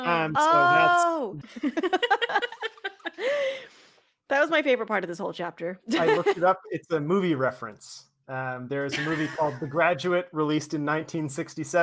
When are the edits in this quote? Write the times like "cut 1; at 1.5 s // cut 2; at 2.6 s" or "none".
cut 1; at 1.4 s